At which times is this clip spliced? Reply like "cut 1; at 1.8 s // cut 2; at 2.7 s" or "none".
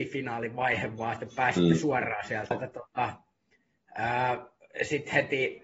cut 1; at 2.5 s